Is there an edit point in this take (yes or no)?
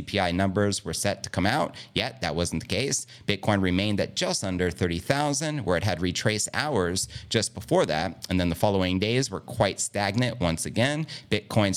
no